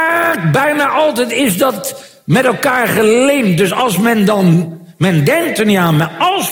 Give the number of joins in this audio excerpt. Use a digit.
0